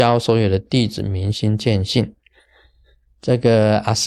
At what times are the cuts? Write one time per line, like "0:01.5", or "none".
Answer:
0:03.1